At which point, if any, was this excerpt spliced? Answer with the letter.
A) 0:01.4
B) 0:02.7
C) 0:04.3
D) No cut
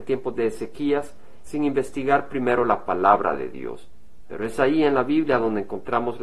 A